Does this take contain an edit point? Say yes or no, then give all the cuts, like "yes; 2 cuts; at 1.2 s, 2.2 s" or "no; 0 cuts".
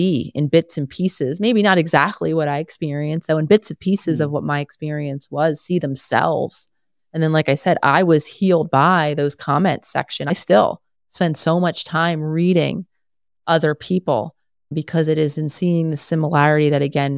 no; 0 cuts